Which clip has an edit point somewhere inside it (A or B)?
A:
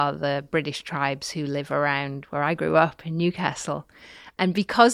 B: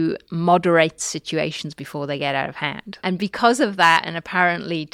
B